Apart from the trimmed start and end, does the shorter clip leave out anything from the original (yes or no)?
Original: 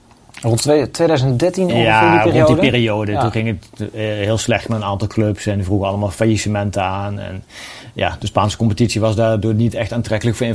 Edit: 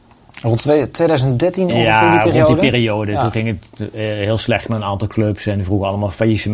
no